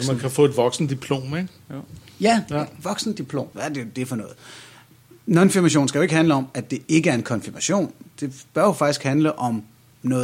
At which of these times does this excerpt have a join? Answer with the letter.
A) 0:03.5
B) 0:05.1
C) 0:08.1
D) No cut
A